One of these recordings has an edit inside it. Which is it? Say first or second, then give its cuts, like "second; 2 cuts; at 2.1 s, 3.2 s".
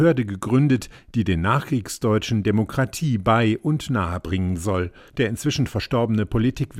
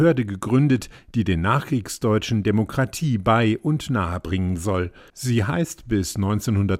first; 1 cut; at 5.1 s